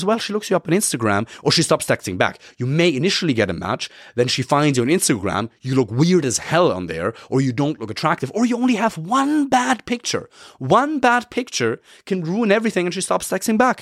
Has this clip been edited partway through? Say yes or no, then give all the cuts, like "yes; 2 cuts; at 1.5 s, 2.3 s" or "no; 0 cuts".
no; 0 cuts